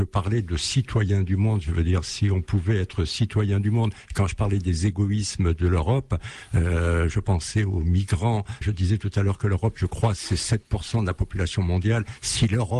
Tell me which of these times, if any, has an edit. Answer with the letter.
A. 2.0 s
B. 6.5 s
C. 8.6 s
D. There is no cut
C